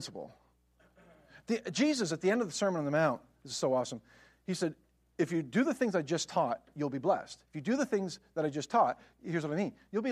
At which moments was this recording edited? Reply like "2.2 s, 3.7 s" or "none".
none